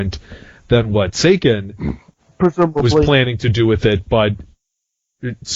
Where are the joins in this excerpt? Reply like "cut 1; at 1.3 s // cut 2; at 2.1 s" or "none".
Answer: none